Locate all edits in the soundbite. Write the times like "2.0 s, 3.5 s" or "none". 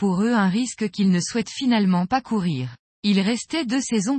2.9 s